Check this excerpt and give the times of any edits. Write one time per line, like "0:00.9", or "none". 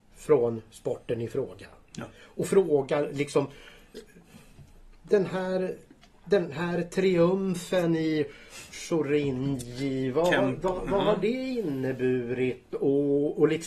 none